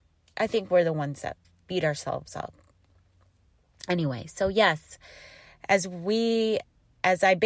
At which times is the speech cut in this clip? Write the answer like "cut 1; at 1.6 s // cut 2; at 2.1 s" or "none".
none